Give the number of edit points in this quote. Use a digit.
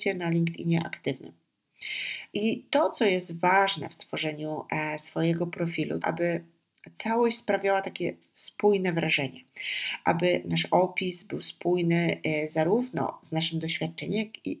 1